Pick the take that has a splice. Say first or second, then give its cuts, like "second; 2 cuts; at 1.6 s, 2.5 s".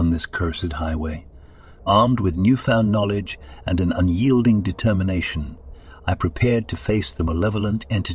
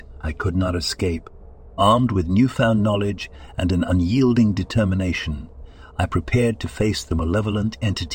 first; 1 cut; at 1.8 s